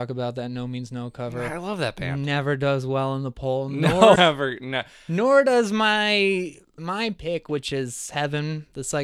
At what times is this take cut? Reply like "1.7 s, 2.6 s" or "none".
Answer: 4.2 s, 6.8 s

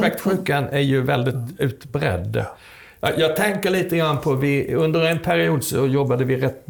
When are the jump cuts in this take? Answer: none

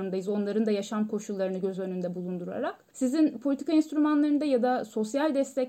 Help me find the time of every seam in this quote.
none

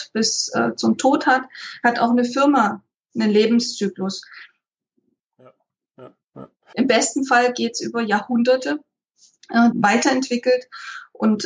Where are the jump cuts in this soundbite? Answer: 5.2 s, 6.7 s, 9.7 s

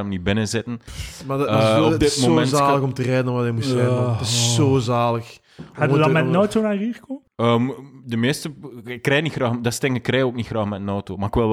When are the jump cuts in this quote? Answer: 7.3 s

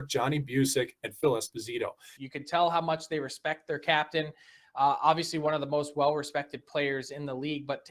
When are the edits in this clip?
2.2 s

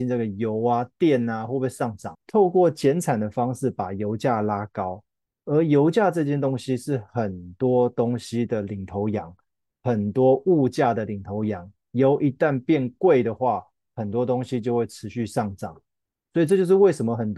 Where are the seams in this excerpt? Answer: 2.1 s

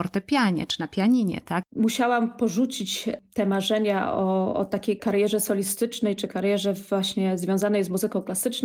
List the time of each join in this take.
1.6 s

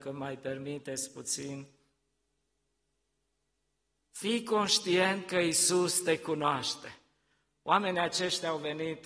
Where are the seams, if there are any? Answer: 4.0 s

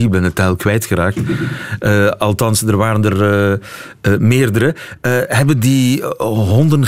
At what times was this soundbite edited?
none

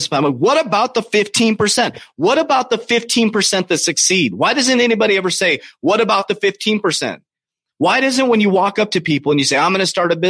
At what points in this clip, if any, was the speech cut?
none

